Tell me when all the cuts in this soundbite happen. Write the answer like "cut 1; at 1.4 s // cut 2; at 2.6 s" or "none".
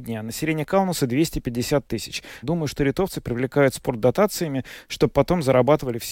cut 1; at 2.4 s